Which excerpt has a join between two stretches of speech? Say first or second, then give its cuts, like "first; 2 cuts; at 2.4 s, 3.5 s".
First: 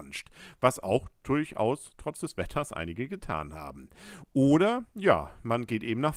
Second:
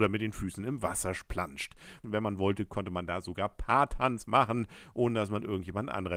second; 1 cut; at 2.0 s